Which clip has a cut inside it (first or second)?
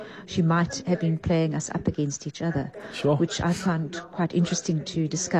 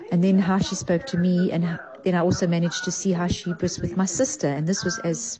first